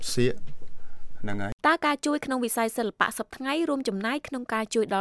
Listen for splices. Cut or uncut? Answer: cut